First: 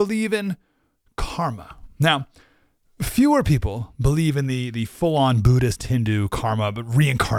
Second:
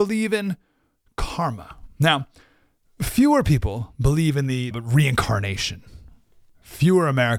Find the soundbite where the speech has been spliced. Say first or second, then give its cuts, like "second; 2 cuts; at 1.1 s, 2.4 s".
second; 1 cut; at 4.7 s